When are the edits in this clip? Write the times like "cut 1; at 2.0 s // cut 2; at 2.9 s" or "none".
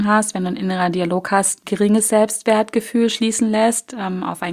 cut 1; at 1.6 s